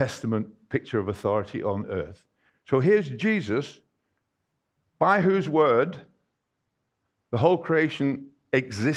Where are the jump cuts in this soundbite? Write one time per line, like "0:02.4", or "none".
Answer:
0:02.5